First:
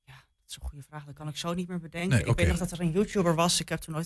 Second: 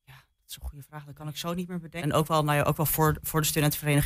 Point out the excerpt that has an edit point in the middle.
second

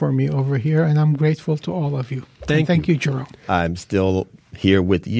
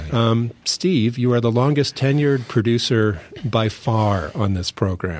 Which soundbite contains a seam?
first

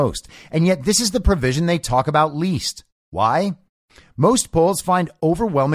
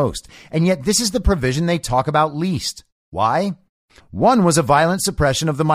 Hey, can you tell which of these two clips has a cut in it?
second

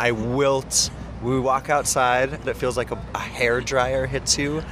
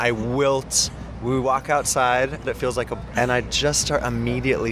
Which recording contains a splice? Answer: second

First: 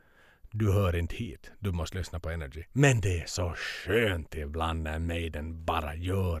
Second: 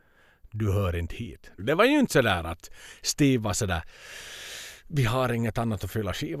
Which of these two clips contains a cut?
second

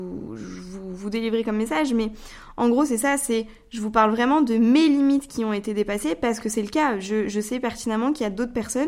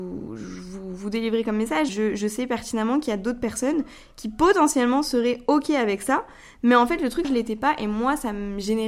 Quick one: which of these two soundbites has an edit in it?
second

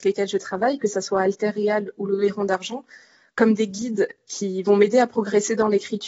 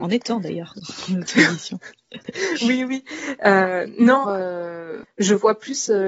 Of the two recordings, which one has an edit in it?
second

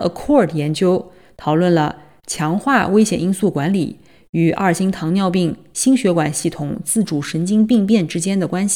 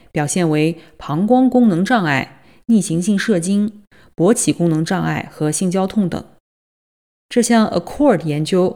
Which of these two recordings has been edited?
second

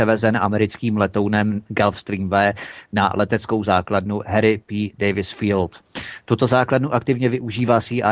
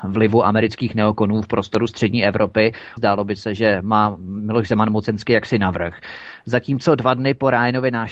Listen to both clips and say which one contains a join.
second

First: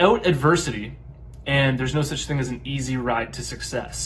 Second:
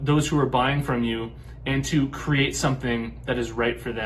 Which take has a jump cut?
first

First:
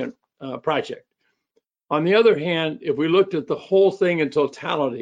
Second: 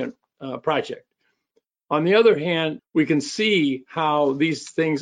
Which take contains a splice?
second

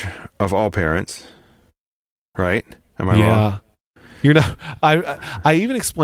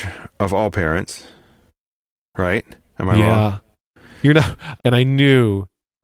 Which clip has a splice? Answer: second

